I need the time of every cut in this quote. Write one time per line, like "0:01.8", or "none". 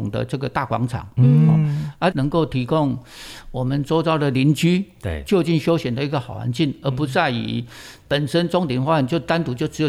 0:02.1